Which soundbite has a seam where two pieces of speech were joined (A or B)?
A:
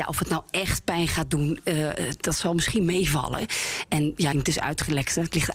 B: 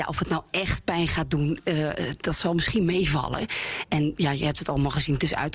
A